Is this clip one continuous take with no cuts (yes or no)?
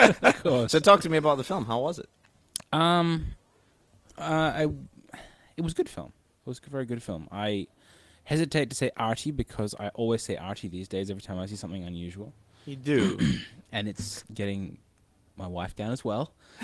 yes